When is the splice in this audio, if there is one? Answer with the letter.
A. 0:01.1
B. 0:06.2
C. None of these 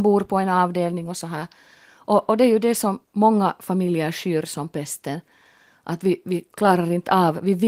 C